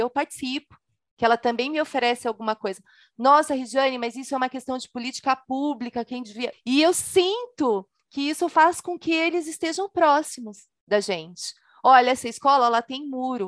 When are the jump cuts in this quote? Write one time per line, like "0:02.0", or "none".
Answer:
0:06.5